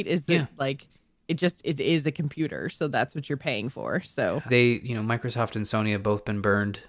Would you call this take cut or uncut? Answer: cut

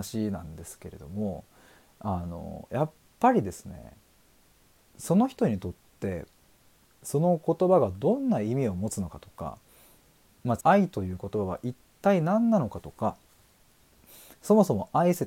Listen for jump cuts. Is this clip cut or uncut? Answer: cut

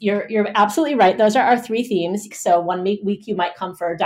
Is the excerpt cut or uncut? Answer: cut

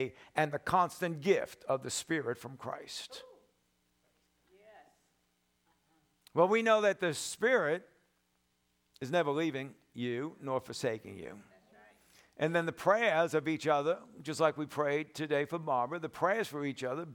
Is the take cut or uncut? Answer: uncut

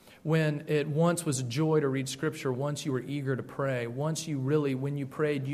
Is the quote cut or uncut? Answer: uncut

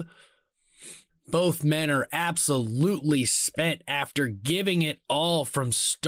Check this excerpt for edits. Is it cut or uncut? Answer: cut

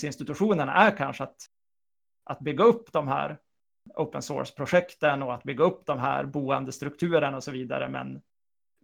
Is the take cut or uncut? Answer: uncut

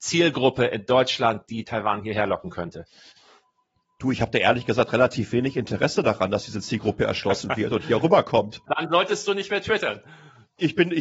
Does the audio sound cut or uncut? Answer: uncut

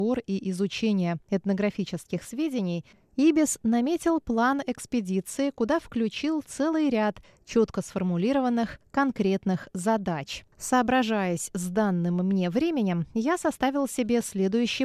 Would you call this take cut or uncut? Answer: cut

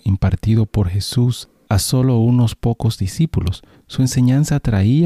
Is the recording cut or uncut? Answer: uncut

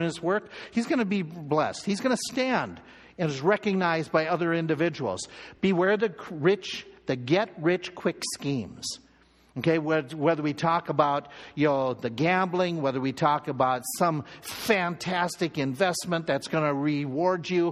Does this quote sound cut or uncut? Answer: uncut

